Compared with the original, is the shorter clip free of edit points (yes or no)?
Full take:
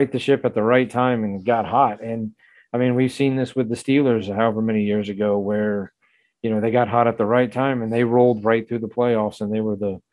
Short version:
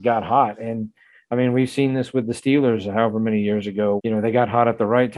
no